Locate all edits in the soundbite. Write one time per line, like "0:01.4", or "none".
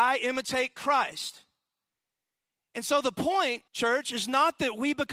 0:03.7